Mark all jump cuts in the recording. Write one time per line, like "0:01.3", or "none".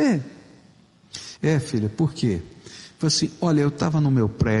0:01.4